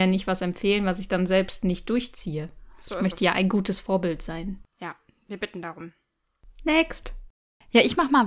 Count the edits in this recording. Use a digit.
0